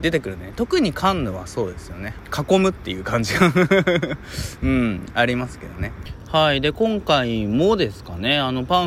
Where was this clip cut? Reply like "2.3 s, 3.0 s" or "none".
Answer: none